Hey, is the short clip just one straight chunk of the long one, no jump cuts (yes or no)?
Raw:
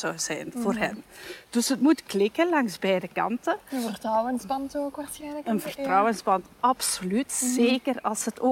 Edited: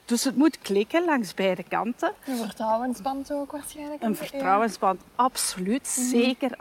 yes